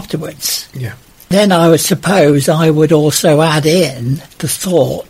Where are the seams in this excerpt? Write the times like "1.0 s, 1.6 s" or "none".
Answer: none